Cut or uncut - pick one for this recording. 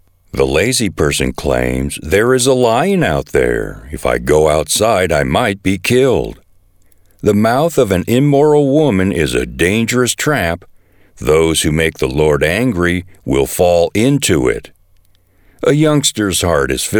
uncut